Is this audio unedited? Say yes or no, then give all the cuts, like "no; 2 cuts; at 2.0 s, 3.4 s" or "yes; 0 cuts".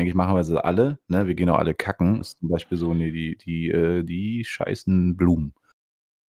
no; 1 cut; at 2.2 s